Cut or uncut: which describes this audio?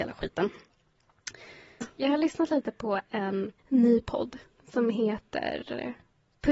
cut